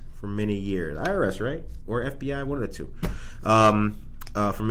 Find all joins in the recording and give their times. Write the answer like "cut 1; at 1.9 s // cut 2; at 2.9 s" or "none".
none